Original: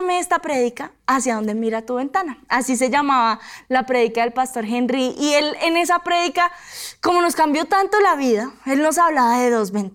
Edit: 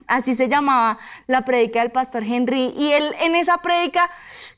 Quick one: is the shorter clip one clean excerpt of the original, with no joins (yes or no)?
yes